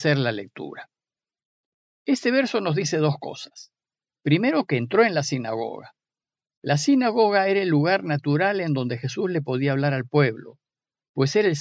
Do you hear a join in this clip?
no; 0 cuts

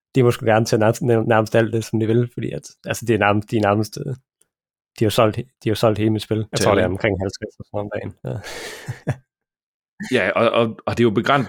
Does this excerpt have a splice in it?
yes; 2 cuts; at 1.8 s, 6.5 s

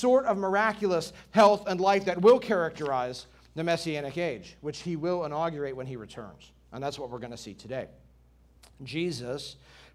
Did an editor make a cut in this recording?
no; 0 cuts

